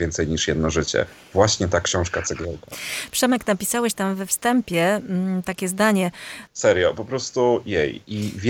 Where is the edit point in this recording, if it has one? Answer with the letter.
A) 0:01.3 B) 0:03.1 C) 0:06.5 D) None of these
C